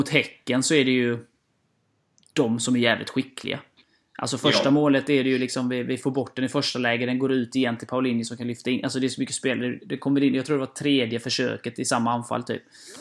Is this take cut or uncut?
cut